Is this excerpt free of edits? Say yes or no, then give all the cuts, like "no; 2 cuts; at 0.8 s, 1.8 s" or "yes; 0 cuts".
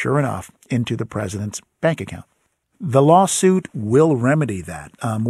no; 1 cut; at 2.6 s